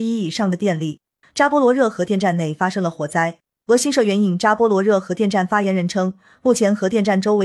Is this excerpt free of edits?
no; 1 cut; at 1.2 s

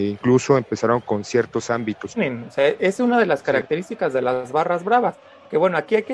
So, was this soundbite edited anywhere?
yes; 1 cut; at 2.1 s

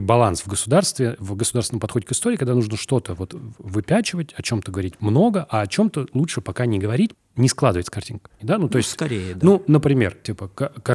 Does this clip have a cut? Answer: yes; 2 cuts; at 7.1 s, 8.4 s

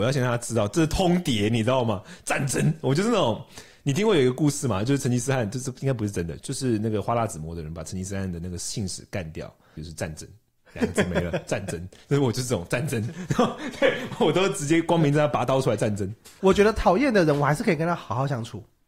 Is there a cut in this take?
yes; 2 cuts; at 9.8 s, 16.4 s

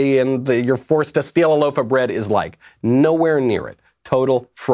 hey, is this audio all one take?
yes; 0 cuts

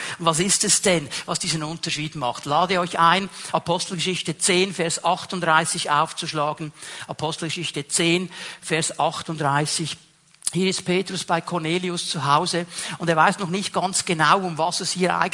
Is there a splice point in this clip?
no; 0 cuts

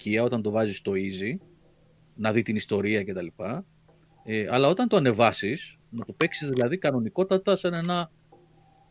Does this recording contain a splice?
yes; 1 cut; at 5.8 s

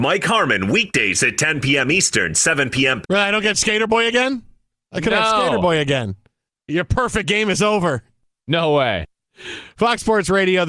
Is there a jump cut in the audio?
yes; 1 cut; at 3.0 s

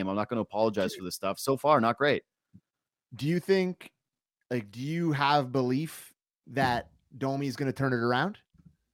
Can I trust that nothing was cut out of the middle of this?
yes; 0 cuts

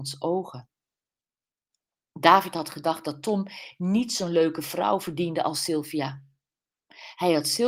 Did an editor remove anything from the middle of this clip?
no; 0 cuts

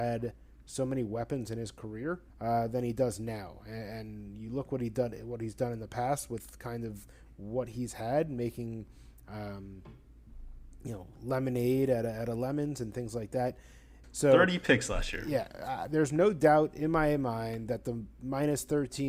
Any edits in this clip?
yes; 2 cuts; at 2.3 s, 14.0 s

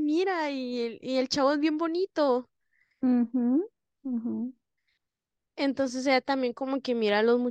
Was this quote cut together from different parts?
yes; 1 cut; at 3.9 s

